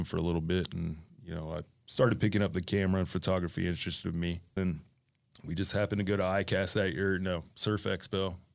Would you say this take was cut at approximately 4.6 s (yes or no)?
yes